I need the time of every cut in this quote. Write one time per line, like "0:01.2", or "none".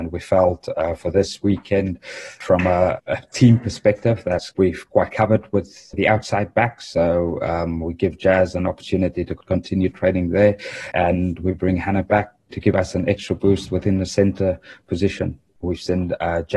0:15.6